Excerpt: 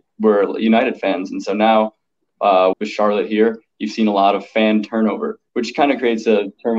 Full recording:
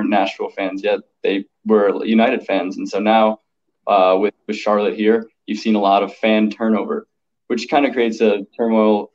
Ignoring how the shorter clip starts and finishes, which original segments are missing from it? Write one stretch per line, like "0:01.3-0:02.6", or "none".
0:04.2-0:04.4
0:07.2-0:07.4